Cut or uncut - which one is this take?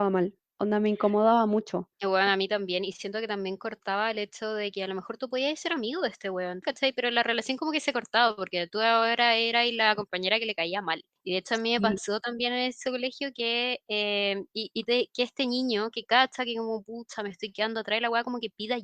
cut